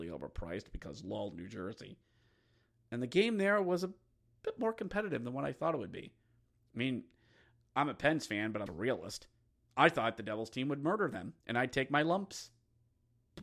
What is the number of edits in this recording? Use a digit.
2